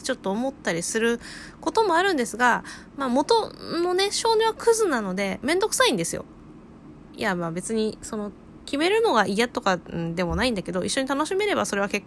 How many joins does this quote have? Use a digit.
0